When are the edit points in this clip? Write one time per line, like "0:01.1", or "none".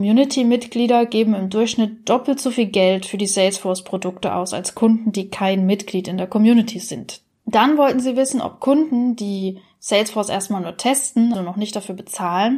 0:07.4
0:11.3